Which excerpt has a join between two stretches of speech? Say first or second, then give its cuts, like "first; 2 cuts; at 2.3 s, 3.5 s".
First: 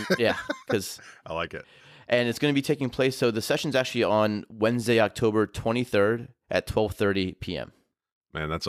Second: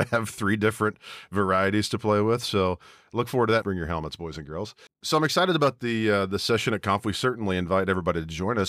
second; 1 cut; at 3.6 s